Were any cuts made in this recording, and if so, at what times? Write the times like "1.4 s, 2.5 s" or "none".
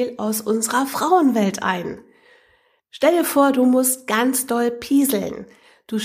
none

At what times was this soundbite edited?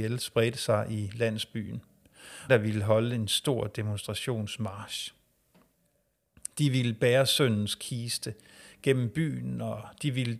2.5 s

